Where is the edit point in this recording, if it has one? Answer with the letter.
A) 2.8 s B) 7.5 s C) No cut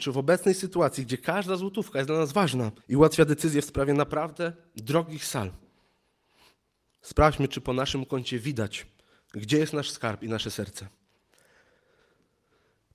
A